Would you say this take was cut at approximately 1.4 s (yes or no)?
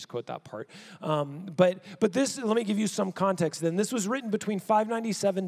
no